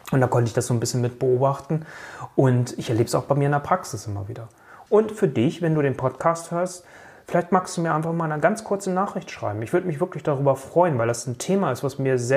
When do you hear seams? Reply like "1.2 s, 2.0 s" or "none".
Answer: 4.9 s